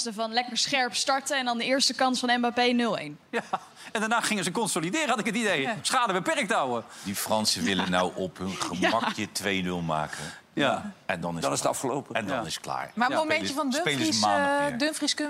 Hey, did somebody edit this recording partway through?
no; 0 cuts

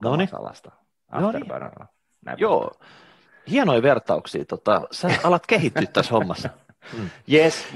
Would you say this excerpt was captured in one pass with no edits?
yes; 0 cuts

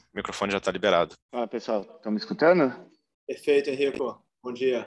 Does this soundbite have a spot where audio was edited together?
yes; 1 cut; at 1.2 s

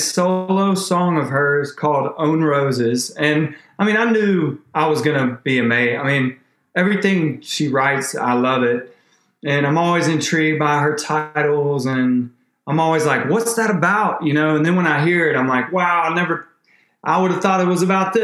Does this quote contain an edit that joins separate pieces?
no; 0 cuts

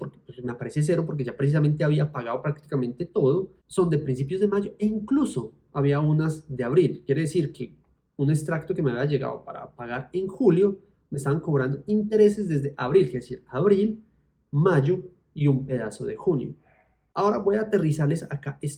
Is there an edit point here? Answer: no; 0 cuts

